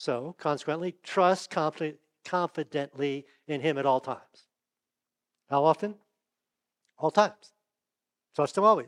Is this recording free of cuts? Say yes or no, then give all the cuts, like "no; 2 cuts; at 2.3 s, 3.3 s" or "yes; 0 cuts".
yes; 0 cuts